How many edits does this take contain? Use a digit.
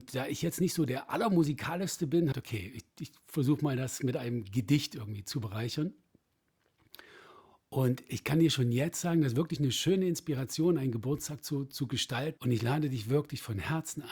2